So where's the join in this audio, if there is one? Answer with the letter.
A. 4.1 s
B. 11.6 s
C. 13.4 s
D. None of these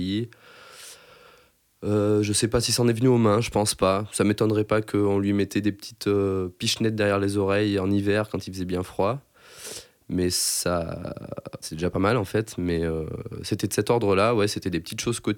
B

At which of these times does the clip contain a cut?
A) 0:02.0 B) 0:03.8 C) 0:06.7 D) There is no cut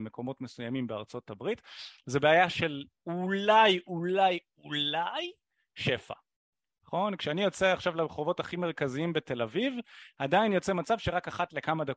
D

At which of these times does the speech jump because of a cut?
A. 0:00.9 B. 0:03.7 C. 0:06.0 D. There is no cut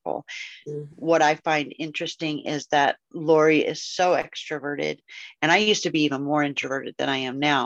A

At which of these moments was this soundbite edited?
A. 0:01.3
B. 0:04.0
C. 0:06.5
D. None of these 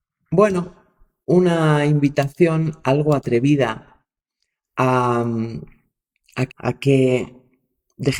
C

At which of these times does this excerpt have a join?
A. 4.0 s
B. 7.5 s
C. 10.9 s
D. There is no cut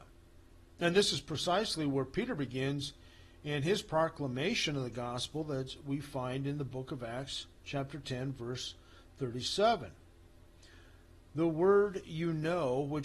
D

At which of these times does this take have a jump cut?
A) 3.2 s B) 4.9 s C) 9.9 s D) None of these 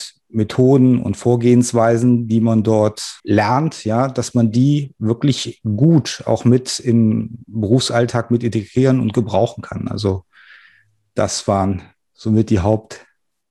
A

